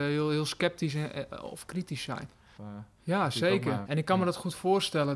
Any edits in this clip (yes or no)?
yes